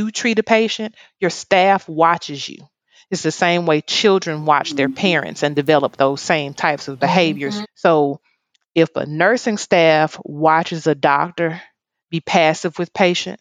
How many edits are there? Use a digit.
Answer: 1